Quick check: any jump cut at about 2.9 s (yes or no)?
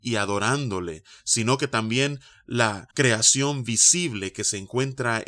yes